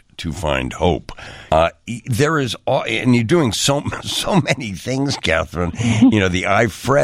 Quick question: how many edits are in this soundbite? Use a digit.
1